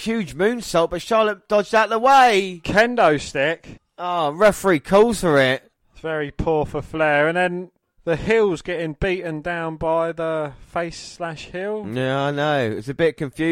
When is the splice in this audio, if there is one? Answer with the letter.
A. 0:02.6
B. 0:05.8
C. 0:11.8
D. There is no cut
B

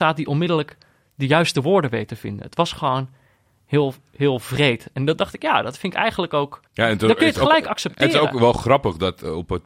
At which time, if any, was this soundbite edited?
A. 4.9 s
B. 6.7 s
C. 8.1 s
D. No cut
B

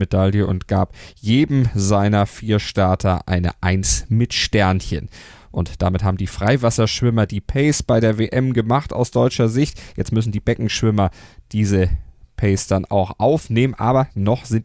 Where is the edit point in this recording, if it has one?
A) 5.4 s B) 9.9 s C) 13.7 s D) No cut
D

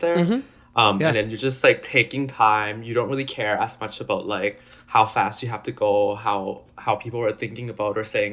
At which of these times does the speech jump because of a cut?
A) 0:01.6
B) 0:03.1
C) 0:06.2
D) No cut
D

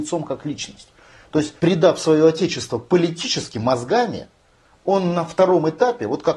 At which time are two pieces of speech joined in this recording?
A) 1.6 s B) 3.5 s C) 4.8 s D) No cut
A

